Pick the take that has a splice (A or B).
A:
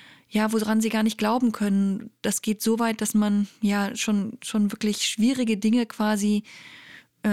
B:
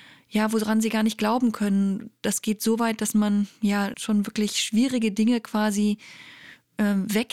B